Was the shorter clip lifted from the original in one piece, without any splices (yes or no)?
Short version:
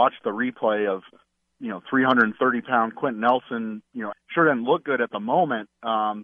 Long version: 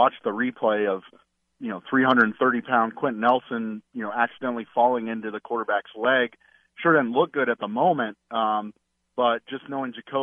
no